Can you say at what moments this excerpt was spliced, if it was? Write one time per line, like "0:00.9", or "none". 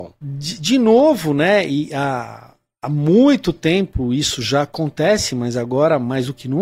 none